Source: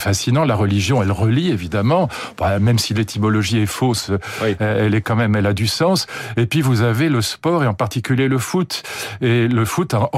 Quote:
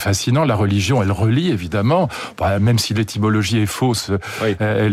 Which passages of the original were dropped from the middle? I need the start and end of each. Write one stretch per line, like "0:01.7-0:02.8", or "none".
none